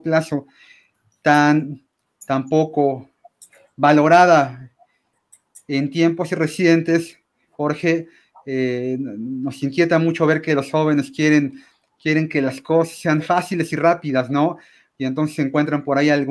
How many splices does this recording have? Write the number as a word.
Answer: zero